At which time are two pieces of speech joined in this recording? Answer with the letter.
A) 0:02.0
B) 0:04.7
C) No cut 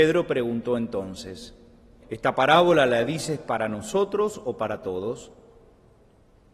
A